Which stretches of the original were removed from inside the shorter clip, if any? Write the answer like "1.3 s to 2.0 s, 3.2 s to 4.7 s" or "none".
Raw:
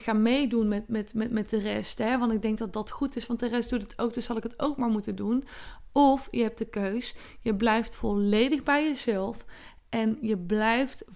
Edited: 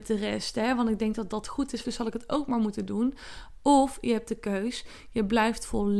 3.3 s to 4.1 s